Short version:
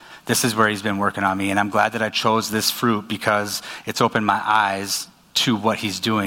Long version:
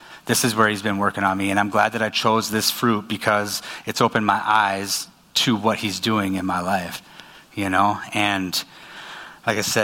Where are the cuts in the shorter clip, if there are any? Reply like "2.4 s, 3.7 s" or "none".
none